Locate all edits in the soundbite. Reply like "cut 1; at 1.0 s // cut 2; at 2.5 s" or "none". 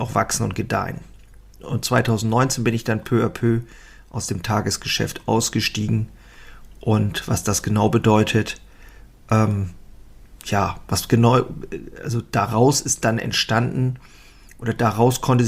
none